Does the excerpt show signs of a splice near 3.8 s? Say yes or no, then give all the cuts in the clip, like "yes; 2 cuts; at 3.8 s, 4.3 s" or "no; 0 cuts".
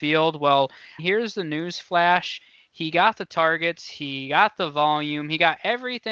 no; 1 cut; at 1.0 s